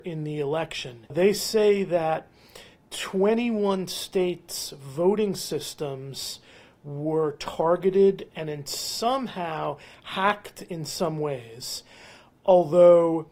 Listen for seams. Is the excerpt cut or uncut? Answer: uncut